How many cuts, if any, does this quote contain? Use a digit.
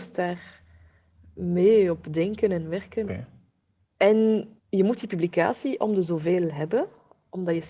2